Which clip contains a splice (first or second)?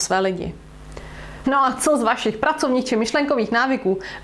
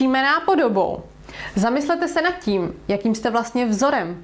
first